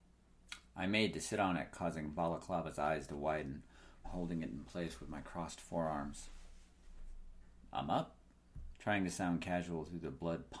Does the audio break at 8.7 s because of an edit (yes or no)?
yes